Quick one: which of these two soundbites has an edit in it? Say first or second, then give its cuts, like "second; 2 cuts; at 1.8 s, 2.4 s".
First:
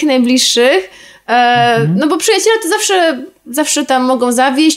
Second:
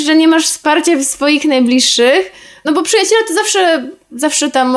second; 1 cut; at 2.6 s